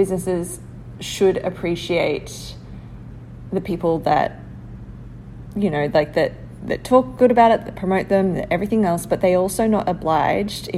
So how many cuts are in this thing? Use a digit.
0